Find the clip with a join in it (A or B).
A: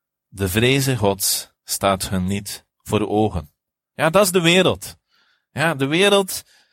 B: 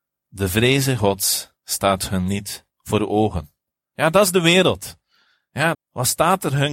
B